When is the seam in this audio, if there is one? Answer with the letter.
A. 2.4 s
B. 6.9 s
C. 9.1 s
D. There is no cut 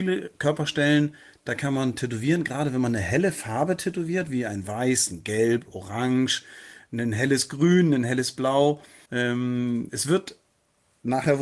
C